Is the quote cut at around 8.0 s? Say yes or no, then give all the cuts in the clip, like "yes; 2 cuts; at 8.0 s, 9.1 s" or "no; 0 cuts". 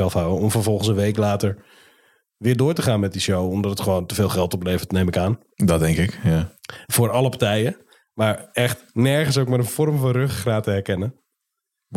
no; 0 cuts